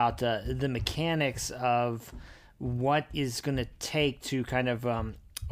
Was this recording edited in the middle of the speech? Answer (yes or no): no